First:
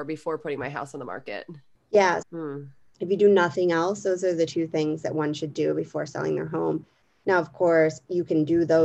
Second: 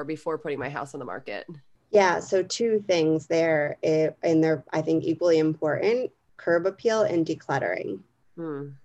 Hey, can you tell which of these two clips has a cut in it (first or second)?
first